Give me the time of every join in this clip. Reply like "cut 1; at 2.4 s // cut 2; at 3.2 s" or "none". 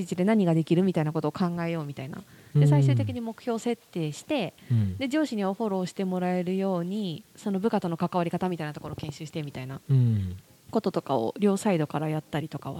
cut 1; at 7.2 s